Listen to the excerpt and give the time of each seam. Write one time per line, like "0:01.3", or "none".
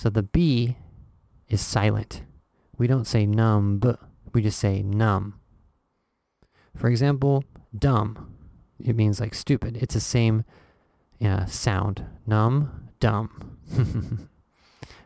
none

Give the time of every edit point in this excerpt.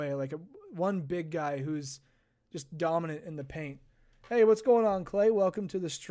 none

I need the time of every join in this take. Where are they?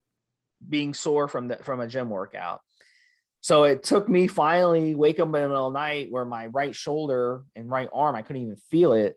none

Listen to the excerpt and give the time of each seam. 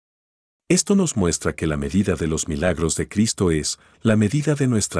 0:03.9

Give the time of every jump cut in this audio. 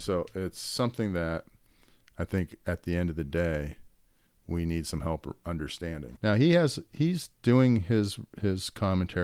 0:06.2

